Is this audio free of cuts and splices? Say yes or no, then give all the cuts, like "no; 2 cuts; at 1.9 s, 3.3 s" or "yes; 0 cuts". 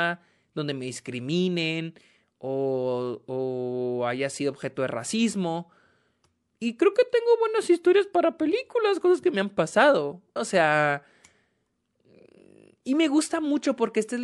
no; 1 cut; at 10.4 s